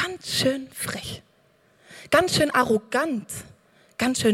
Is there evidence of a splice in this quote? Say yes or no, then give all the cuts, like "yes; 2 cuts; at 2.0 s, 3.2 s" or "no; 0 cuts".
no; 0 cuts